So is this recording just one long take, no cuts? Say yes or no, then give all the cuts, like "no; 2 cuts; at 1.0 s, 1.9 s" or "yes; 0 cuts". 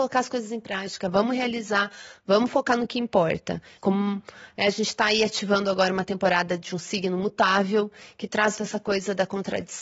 no; 2 cuts; at 3.8 s, 8.6 s